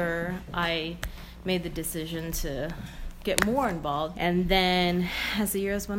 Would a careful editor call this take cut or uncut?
cut